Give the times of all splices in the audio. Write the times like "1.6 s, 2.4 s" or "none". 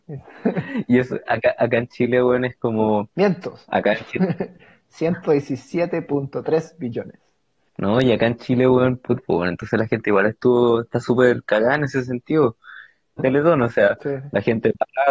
7.7 s, 9.2 s, 13.2 s